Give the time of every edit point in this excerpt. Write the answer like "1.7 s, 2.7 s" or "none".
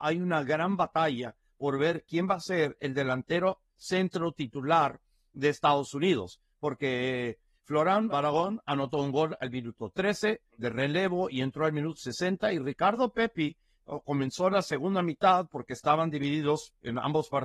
8.1 s, 10.5 s